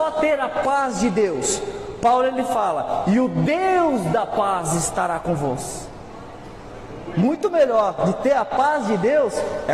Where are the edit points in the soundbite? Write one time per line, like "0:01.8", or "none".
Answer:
none